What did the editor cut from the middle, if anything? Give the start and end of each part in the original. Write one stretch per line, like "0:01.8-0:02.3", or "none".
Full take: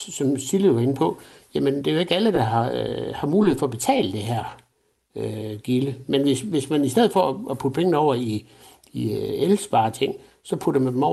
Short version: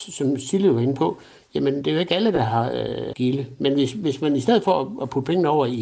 0:03.1-0:05.6